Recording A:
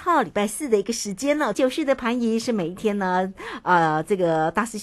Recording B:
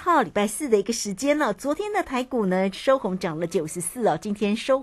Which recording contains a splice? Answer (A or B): A